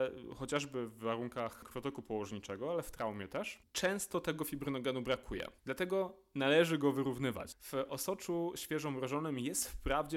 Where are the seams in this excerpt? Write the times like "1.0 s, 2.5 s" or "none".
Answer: none